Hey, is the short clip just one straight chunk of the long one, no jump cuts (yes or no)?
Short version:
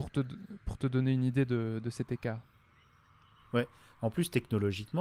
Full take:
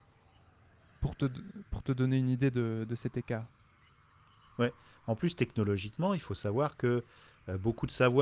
yes